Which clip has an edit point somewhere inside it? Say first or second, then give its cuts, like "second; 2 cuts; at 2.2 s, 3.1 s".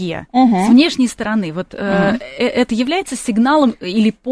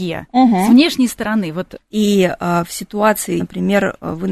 second; 2 cuts; at 1.8 s, 3.4 s